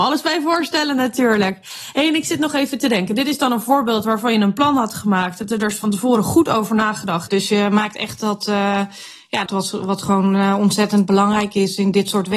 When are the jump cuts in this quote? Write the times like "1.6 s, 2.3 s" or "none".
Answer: 7.3 s, 9.5 s

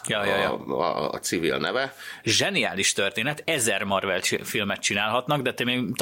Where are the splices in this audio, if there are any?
2.2 s, 3.4 s

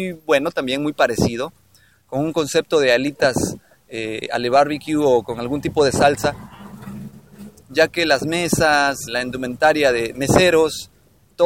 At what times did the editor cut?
7.6 s, 9.1 s, 10.1 s

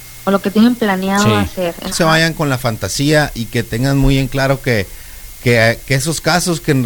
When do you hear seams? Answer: 1.9 s

